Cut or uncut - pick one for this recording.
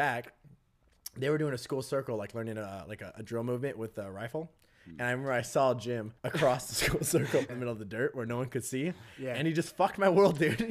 cut